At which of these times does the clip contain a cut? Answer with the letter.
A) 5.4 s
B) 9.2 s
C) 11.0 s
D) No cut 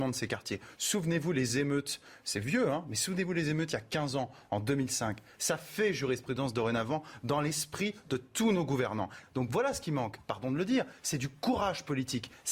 B